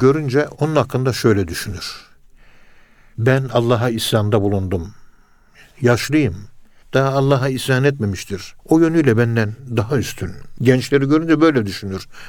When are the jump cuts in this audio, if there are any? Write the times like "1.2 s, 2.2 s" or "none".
6.8 s, 8.6 s, 10.6 s